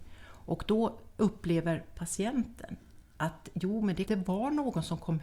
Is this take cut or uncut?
cut